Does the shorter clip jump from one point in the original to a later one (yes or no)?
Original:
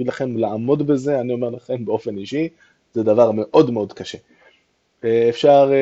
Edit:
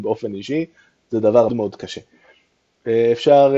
yes